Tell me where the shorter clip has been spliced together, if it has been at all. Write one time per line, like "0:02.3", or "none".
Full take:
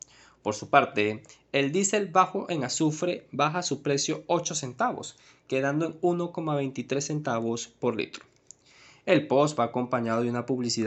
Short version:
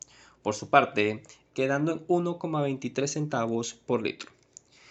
0:01.5

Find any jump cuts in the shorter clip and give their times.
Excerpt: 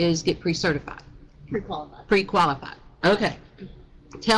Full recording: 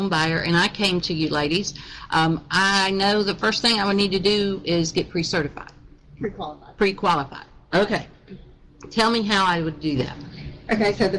none

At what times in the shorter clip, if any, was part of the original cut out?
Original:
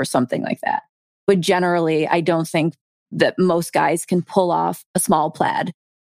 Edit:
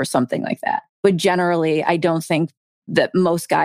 0:00.9

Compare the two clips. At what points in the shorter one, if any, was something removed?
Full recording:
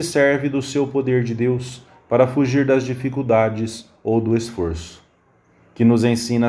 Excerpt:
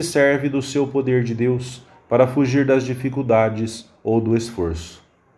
none

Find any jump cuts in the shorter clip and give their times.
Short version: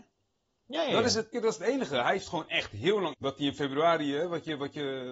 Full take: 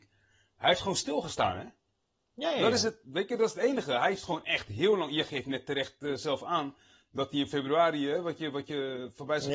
0:01.3
0:03.1

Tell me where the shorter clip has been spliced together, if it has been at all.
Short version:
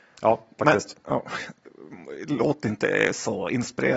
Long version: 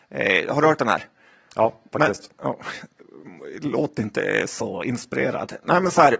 none

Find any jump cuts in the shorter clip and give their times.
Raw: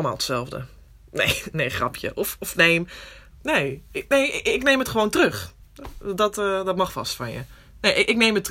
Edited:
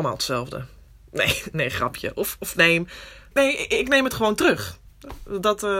0:03.3

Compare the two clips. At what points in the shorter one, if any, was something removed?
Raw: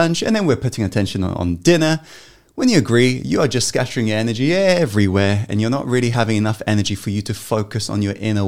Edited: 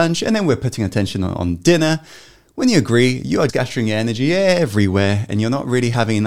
0:03.5

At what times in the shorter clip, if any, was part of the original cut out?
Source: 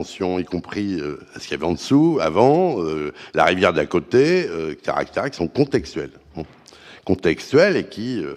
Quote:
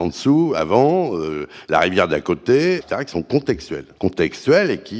0:02.8
0:04.0

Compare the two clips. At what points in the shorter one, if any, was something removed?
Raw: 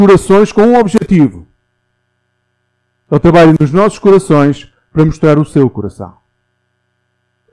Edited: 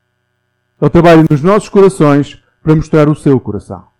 none

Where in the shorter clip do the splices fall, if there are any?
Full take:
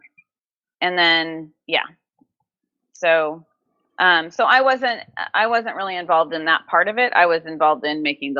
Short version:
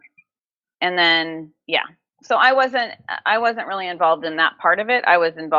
0:02.2

